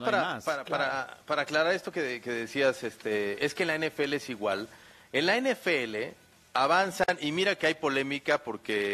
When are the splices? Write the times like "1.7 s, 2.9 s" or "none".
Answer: none